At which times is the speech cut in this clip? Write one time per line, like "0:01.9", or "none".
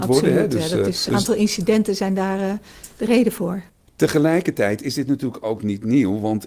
0:01.1